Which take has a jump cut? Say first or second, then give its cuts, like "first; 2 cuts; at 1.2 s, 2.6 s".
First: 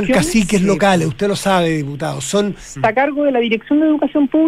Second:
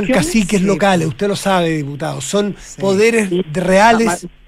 first; 1 cut; at 2.8 s